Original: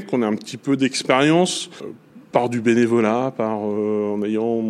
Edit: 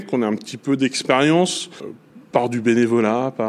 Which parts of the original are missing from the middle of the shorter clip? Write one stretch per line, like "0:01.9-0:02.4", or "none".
none

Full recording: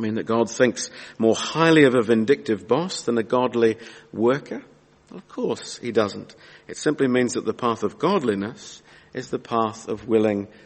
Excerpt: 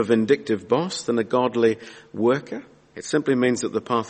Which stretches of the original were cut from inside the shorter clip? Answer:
0:04.9-0:06.6

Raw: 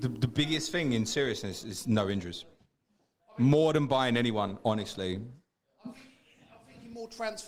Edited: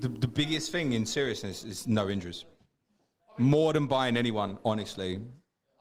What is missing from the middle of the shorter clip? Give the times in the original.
none

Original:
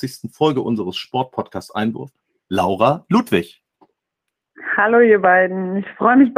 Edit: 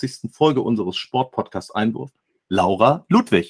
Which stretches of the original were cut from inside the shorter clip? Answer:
none

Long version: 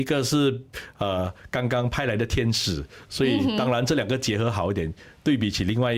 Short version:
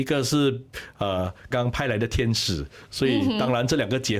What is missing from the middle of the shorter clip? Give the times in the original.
0:01.5-0:01.7

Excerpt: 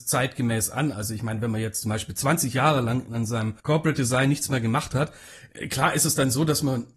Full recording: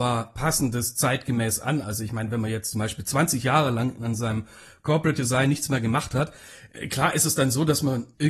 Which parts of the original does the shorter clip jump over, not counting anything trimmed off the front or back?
0:04.5-0:04.8

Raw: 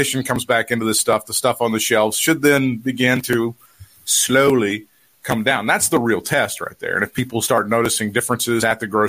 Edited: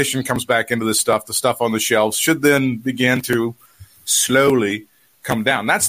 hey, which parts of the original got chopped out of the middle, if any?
none

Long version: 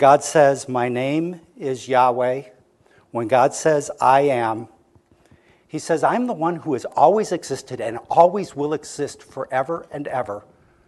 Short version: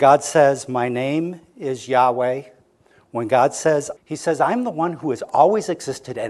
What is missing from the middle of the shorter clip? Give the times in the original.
0:04.0-0:05.6

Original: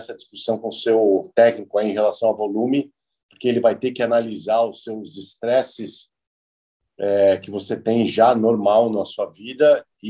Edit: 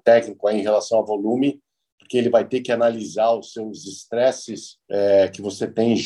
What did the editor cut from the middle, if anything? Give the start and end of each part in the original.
0:06.1-0:06.9

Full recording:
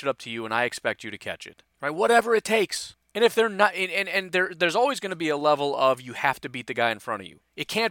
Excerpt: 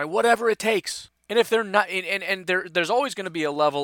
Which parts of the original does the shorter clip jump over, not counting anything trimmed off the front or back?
none

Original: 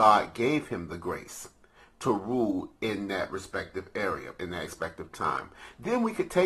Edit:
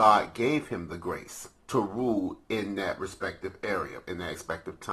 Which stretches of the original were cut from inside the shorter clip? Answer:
0:01.6-0:01.9

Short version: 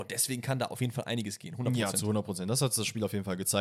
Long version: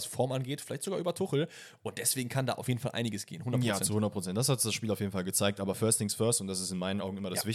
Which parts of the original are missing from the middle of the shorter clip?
none

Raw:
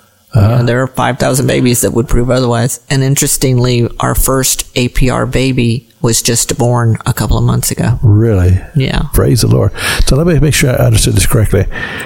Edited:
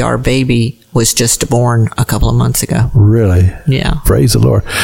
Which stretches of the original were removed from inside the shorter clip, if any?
none

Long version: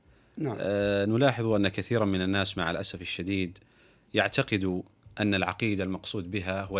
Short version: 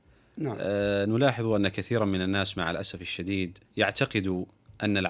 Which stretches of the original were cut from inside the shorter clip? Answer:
0:03.7-0:04.0

